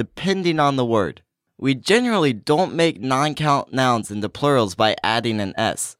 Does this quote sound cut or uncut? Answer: uncut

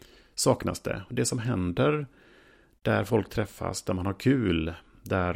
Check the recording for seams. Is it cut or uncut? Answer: uncut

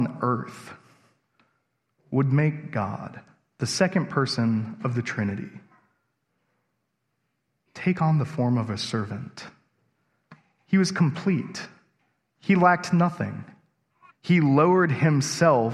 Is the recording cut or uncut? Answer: cut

